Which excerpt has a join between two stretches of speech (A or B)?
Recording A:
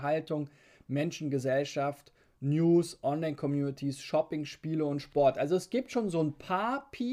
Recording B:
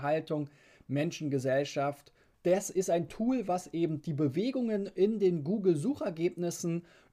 B